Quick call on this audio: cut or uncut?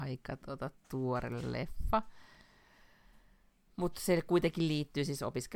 uncut